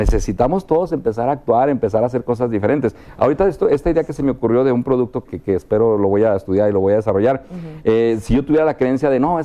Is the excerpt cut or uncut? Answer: cut